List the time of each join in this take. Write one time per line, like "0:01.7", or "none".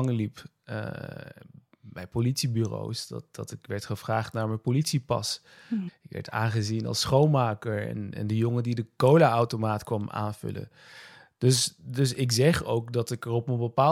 0:05.9